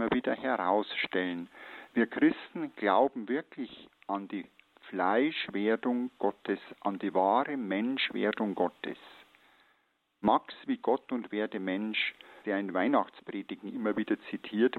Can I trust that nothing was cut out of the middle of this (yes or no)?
no